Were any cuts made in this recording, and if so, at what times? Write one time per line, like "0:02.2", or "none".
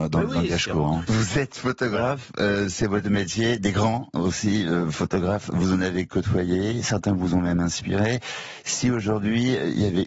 0:01.1